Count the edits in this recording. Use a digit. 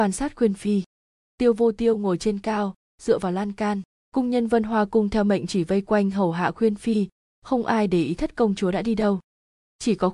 1